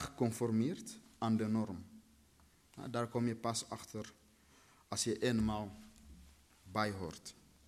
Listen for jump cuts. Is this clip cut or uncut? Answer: uncut